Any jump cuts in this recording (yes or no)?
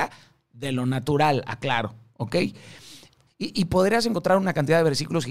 yes